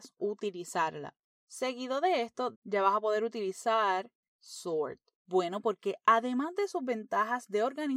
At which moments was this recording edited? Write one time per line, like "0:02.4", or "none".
0:02.5
0:05.2